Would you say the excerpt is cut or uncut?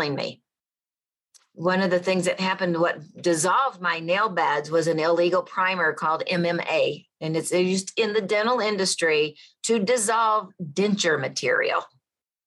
uncut